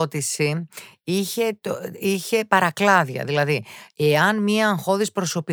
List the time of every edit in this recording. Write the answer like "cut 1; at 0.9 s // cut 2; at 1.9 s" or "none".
none